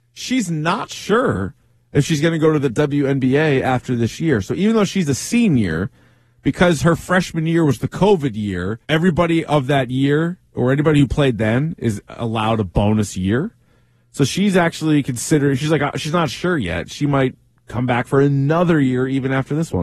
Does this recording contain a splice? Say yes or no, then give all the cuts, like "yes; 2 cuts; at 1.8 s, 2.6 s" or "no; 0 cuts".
yes; 1 cut; at 8.8 s